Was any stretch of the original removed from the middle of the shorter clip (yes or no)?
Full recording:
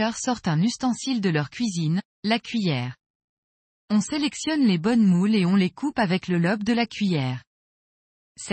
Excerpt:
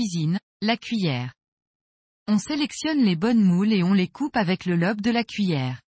no